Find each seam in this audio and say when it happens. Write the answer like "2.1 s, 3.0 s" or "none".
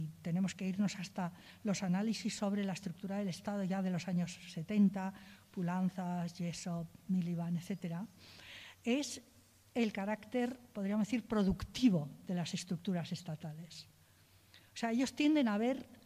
none

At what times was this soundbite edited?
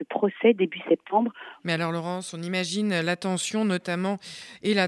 1.6 s

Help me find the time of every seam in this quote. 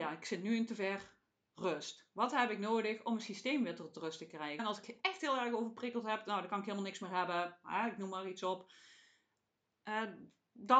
4.6 s

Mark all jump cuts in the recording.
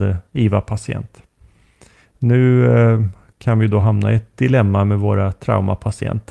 none

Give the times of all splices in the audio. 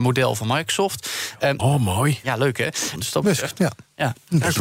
1.6 s, 3.0 s

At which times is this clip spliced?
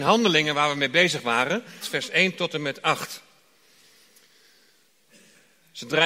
1.8 s

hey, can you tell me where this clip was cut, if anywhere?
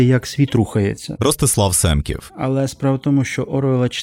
2.3 s

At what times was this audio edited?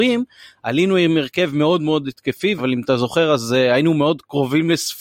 2.6 s

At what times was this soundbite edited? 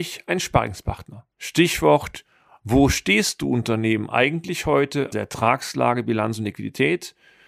1.3 s, 5.1 s

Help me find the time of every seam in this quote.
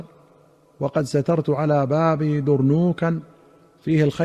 none

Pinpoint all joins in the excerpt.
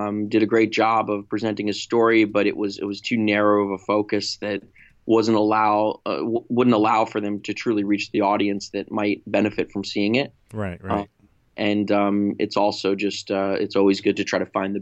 7.4 s

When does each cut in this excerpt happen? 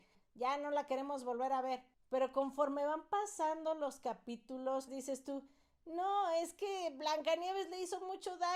4.9 s

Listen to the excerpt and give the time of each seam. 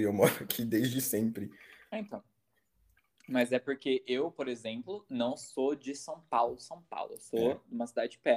none

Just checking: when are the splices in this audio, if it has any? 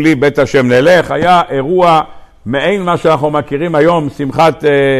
none

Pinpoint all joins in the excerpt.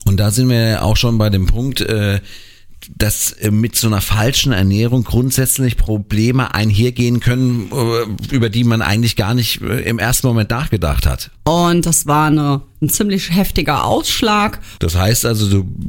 11.4 s, 14.8 s

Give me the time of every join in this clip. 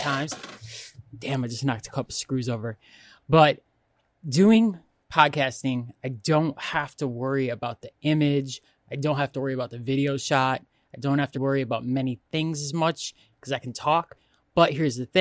11.3 s

